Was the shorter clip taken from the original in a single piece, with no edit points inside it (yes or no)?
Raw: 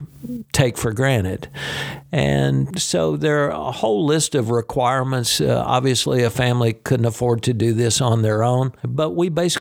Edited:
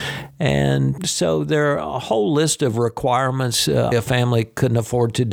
no